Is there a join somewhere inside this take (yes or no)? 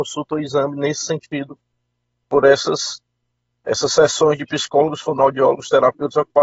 no